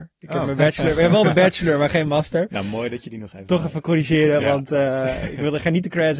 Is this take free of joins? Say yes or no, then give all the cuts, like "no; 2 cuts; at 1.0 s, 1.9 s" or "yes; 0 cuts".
yes; 0 cuts